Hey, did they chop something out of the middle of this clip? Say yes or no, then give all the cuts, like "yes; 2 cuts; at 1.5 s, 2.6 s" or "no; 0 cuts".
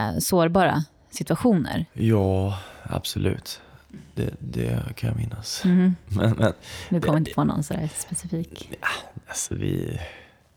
no; 0 cuts